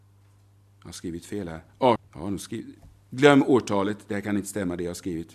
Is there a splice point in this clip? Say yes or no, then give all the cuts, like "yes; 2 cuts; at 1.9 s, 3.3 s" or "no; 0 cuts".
yes; 1 cut; at 2.0 s